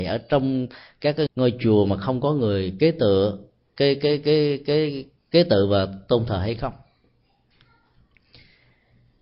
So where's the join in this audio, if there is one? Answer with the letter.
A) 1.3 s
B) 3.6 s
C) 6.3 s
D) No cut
A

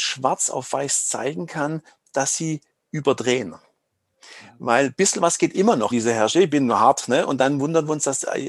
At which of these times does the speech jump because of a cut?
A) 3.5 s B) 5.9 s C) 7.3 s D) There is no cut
B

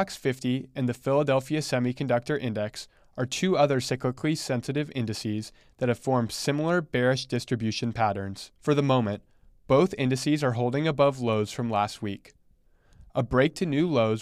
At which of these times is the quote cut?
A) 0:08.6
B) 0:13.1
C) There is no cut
A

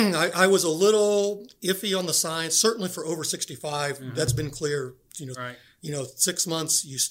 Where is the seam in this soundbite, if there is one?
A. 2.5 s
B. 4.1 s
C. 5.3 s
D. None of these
C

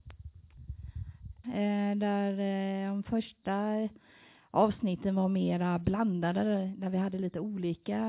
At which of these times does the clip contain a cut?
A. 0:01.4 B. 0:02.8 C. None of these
A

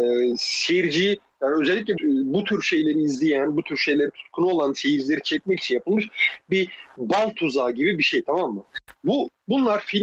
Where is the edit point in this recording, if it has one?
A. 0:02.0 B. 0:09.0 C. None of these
A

